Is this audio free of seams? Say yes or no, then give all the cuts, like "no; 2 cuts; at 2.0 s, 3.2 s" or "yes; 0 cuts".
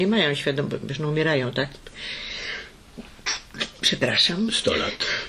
yes; 0 cuts